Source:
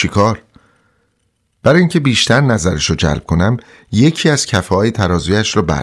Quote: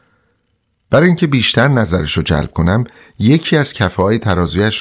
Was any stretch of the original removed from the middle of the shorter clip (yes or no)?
no